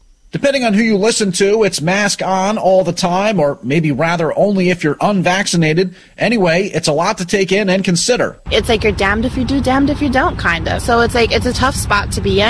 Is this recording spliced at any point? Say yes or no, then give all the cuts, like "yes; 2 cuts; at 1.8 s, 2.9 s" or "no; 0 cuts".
no; 0 cuts